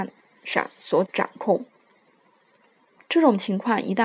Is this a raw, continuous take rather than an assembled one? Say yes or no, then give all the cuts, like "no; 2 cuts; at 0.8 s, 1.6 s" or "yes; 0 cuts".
no; 1 cut; at 1.0 s